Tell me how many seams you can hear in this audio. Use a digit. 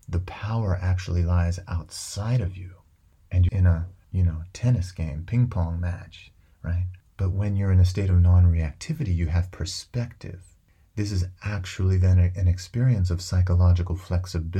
1